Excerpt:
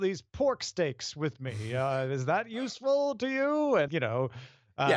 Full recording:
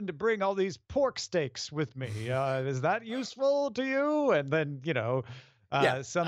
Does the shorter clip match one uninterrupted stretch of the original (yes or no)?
no